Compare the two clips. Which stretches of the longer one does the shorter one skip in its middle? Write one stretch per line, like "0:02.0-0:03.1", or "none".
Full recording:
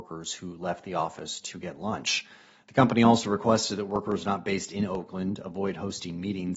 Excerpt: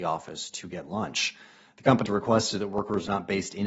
0:03.0-0:03.2